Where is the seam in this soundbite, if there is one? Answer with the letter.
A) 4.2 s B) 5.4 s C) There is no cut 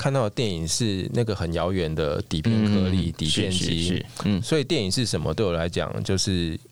C